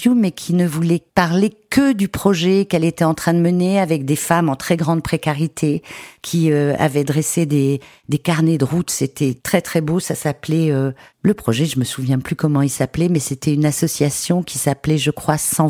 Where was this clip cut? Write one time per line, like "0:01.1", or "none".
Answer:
none